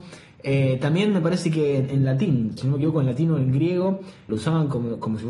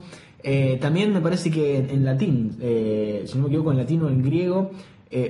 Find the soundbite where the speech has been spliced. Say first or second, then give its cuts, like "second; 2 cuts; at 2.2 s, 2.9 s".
first; 2 cuts; at 2.6 s, 4.3 s